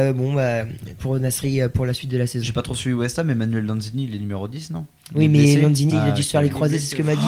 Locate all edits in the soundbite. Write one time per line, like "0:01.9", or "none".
0:01.0
0:05.9